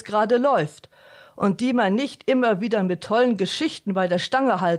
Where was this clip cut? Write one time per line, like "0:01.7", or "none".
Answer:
none